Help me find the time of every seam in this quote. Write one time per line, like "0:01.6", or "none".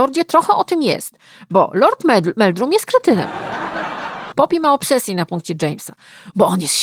0:04.3